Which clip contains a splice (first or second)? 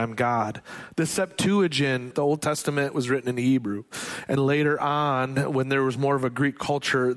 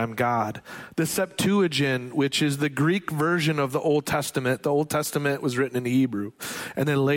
first